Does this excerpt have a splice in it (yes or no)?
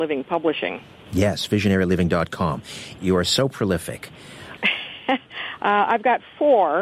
yes